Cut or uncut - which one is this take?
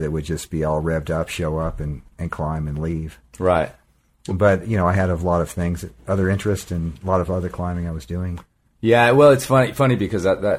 uncut